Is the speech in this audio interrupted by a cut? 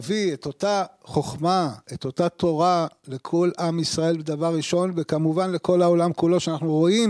no; 0 cuts

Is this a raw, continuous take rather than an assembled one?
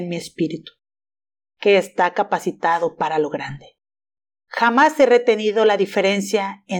yes; 0 cuts

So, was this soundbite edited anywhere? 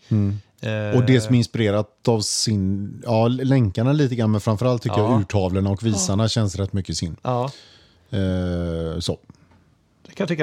no; 0 cuts

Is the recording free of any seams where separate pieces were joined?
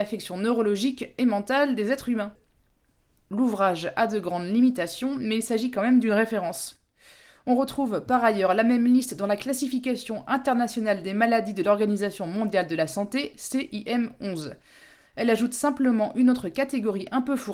yes; 0 cuts

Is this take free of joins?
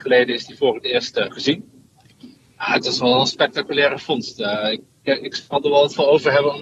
no; 2 cuts; at 2.5 s, 4.8 s

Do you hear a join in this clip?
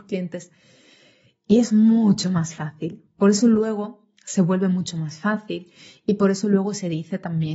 no; 0 cuts

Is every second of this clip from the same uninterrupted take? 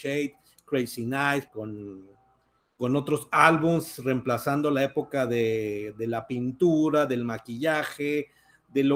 no; 1 cut; at 1.5 s

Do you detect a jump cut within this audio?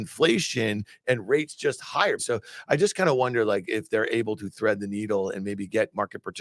yes; 1 cut; at 2.2 s

